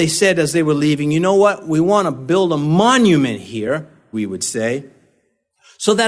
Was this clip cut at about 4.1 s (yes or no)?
yes